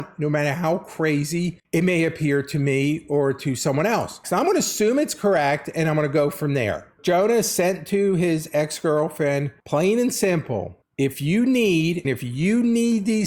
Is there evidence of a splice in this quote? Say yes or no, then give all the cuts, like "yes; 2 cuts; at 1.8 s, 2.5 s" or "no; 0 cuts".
yes; 2 cuts; at 4.2 s, 12.0 s